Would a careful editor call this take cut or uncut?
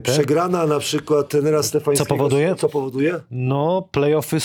uncut